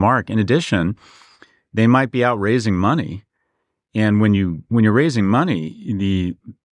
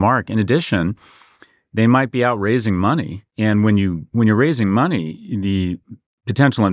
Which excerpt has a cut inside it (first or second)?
second